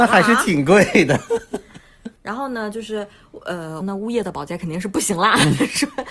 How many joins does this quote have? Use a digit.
2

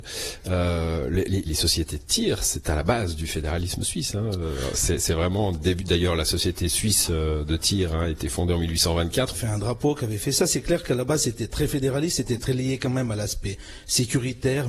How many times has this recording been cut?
2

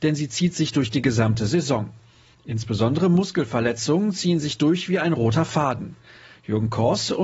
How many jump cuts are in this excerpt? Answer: 0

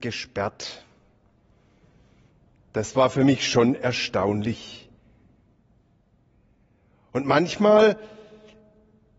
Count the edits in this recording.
0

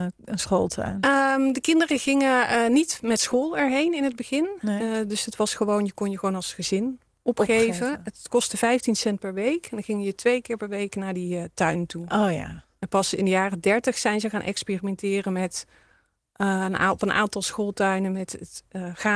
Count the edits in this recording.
0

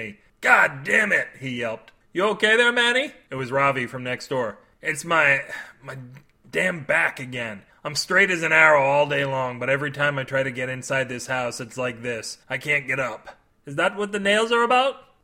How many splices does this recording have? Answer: 0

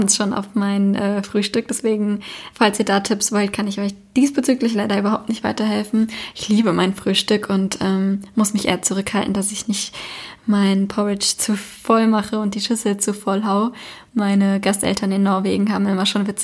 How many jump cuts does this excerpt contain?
1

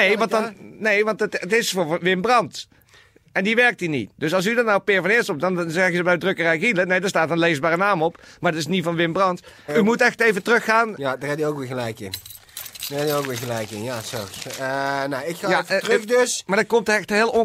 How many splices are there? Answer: 1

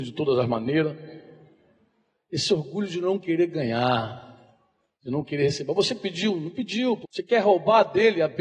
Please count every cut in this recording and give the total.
1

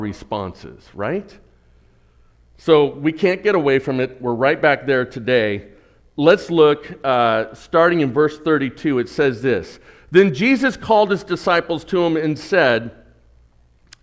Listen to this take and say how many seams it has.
0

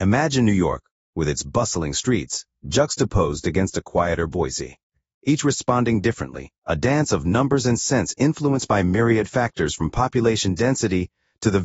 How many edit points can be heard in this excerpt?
0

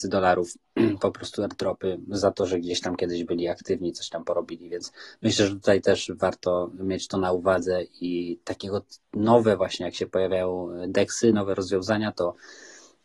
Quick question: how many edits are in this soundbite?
0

